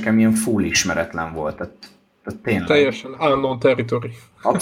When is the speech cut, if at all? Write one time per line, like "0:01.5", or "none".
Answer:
none